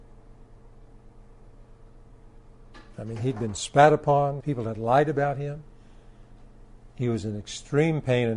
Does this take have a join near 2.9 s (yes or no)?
no